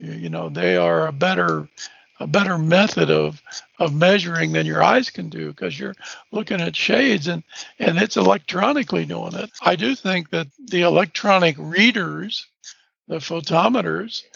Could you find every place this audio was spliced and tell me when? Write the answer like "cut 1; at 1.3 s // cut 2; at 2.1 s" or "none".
cut 1; at 9.5 s // cut 2; at 10.5 s